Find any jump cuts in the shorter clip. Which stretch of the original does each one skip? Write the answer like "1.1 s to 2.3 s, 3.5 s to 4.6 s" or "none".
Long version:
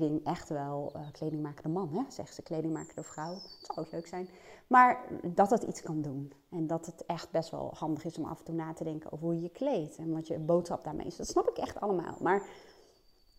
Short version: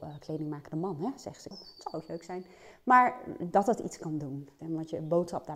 2.4 s to 3.3 s, 6.4 s to 10.0 s